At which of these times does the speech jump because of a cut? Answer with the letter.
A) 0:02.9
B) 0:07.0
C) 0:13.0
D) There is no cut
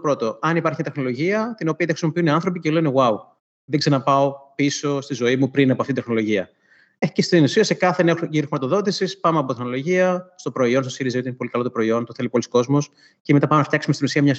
D